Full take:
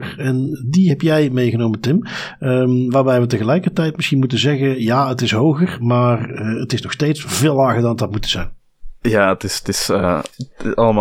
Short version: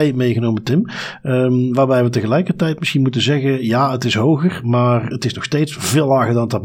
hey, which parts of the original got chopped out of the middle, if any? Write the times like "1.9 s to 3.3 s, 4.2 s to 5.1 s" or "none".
6.3 s to 6.6 s